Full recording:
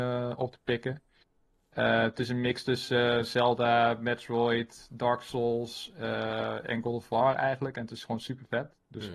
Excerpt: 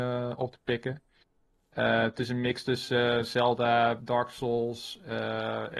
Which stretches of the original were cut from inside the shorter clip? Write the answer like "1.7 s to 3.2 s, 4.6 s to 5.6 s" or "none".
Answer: 4.0 s to 4.9 s